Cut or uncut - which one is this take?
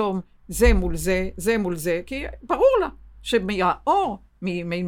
uncut